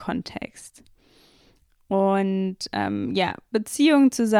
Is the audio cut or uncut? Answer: uncut